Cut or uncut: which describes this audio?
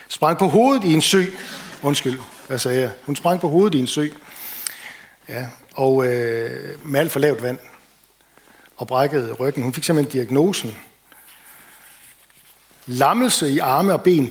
cut